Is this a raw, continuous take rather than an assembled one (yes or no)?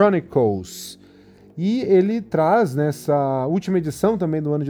yes